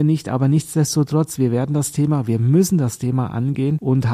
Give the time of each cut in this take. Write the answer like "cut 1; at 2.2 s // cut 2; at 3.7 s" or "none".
none